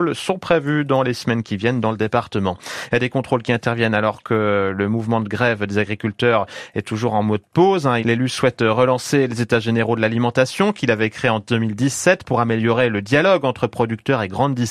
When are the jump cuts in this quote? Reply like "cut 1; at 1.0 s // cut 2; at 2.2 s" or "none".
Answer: cut 1; at 8.0 s